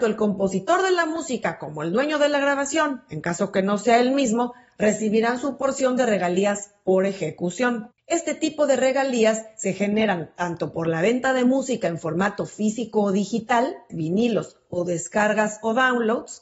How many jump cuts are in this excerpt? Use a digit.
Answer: 2